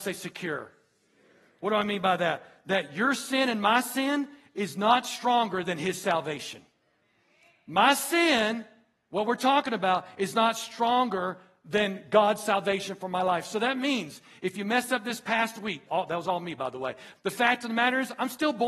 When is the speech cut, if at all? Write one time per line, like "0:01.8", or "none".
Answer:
0:15.8
0:17.1

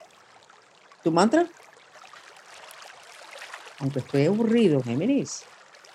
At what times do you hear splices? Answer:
0:03.7
0:04.8

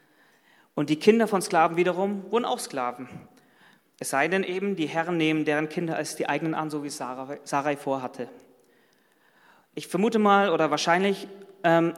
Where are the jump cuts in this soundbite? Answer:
none

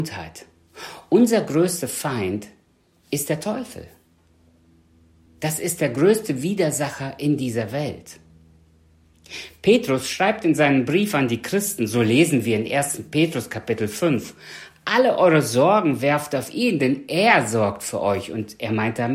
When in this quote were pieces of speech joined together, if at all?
none

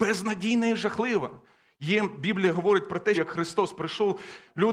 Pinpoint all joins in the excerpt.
0:03.1

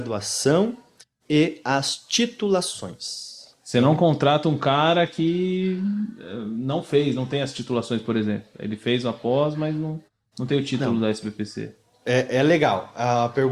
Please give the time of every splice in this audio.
none

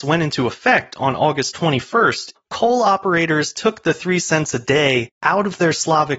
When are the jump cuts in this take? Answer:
0:02.4

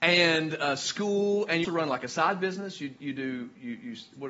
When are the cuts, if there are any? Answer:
0:01.6

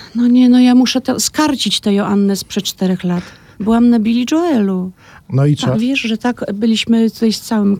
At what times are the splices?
0:05.7

